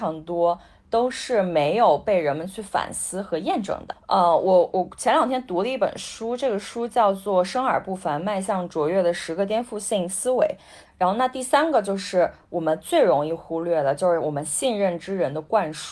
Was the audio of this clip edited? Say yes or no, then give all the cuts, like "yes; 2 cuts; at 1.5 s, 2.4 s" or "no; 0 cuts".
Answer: yes; 1 cut; at 10.9 s